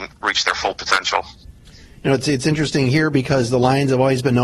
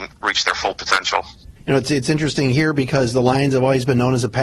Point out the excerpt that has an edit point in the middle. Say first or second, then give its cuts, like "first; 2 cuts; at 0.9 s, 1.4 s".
second; 1 cut; at 1.6 s